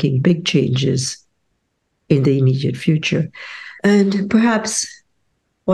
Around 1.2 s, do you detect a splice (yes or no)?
no